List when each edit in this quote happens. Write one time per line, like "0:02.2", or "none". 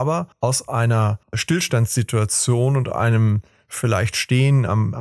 0:01.2